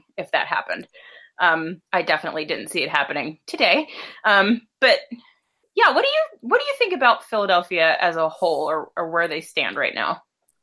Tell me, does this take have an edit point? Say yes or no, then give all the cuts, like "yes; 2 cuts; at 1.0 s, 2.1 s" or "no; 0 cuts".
yes; 1 cut; at 1.9 s